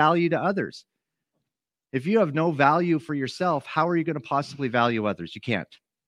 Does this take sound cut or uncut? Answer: uncut